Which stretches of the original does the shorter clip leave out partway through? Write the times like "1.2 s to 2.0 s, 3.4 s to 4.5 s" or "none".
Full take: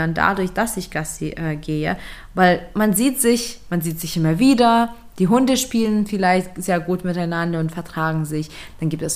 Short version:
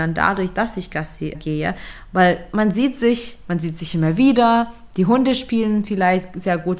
1.3 s to 1.6 s

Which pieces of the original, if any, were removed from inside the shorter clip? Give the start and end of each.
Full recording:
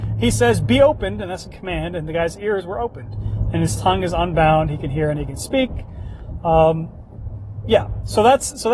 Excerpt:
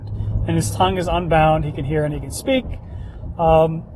none

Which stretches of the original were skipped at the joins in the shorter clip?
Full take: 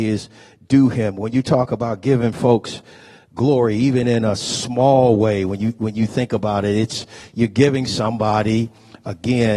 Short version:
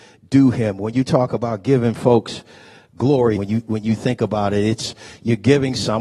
3.7 s to 5.5 s

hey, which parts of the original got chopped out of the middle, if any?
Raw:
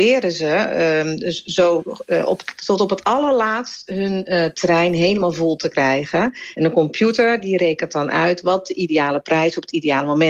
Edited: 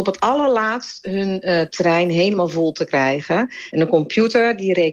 none

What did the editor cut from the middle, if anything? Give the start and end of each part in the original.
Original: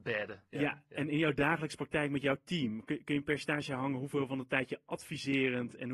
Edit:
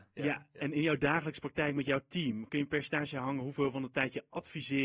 2.8 s to 3.0 s

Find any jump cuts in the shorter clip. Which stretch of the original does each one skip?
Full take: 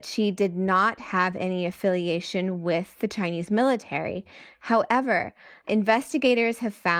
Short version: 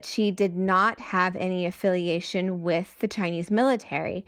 none

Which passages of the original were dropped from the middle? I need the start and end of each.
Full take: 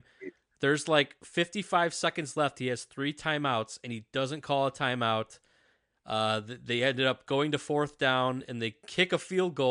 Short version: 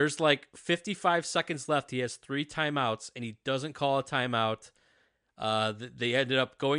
none

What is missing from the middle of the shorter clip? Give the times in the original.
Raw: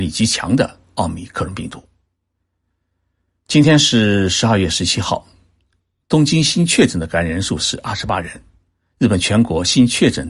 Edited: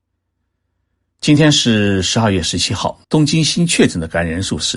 5.3 s to 6.0 s

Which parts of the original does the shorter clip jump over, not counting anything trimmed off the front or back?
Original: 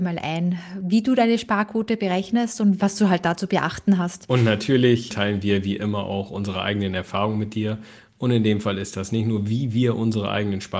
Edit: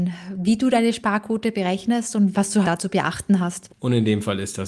3.1 s to 3.2 s, 4.3 s to 8.1 s

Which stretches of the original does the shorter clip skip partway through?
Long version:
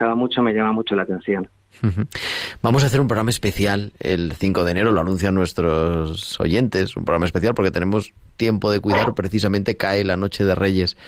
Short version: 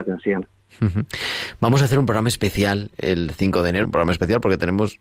4.8 s to 6.9 s

